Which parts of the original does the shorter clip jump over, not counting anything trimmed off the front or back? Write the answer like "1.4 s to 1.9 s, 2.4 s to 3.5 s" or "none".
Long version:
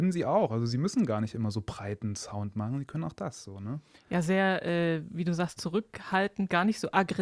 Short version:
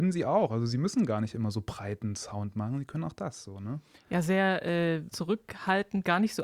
5.1 s to 5.5 s